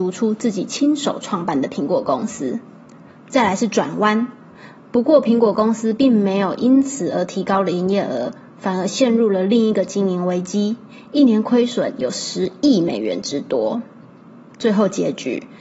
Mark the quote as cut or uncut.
uncut